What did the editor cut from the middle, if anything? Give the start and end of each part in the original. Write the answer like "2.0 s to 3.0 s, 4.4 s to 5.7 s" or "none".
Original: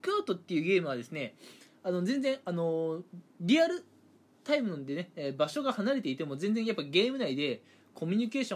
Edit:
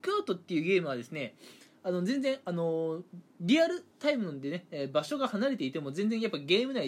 3.9 s to 4.3 s